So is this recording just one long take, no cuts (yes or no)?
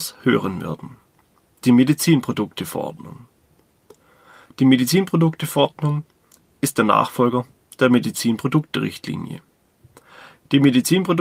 yes